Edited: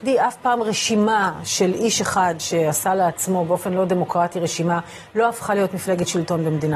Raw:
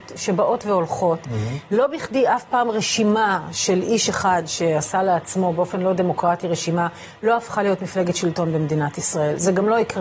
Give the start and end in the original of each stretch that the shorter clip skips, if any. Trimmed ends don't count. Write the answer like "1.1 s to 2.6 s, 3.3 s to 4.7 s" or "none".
none